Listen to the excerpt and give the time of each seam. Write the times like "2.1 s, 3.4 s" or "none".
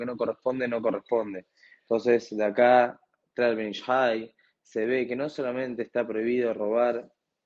none